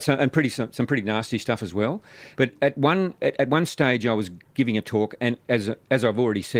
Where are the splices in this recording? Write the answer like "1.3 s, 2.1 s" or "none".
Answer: 2.4 s